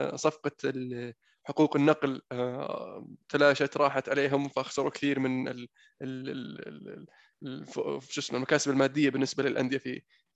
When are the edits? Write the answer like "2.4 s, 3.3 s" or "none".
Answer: 3.2 s